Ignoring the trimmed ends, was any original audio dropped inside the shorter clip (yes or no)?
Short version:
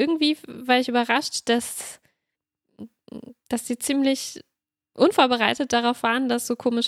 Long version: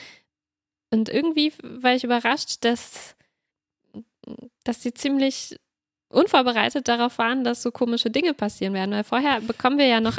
no